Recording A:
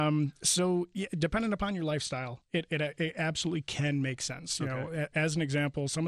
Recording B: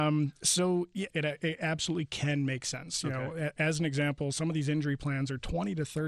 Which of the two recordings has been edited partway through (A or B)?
B